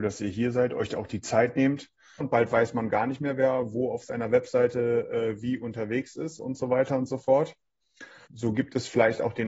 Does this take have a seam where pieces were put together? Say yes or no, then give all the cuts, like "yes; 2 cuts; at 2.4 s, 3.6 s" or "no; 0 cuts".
yes; 2 cuts; at 2.2 s, 8.3 s